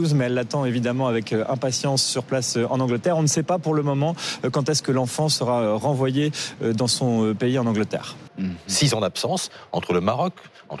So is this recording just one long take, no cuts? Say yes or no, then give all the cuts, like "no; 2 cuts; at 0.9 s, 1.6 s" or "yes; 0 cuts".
no; 1 cut; at 8.3 s